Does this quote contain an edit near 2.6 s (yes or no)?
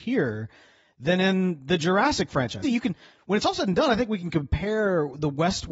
yes